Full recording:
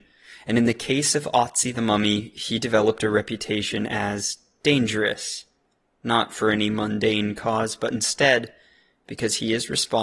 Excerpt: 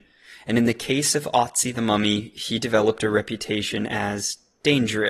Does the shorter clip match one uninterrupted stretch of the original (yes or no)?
yes